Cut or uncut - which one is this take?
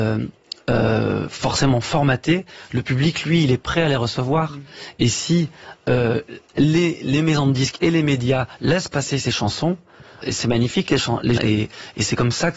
cut